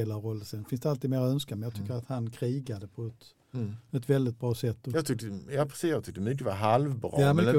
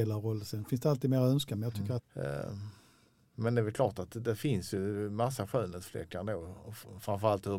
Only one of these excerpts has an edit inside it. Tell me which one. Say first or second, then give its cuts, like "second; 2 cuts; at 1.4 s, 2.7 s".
second; 1 cut; at 2.0 s